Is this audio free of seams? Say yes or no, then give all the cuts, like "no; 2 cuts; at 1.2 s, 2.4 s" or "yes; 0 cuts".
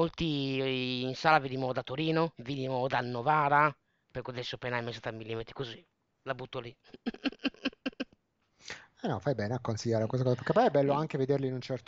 yes; 0 cuts